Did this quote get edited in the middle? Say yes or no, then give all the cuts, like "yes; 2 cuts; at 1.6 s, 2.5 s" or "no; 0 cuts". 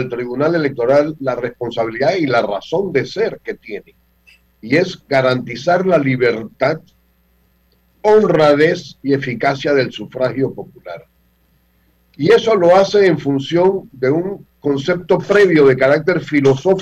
no; 0 cuts